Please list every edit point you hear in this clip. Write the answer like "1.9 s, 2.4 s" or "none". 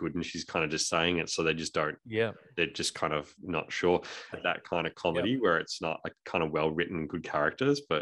4.3 s